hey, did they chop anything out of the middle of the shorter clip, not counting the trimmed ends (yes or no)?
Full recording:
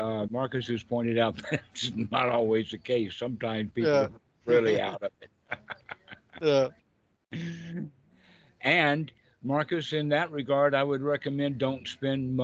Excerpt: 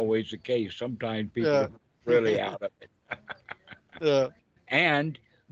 yes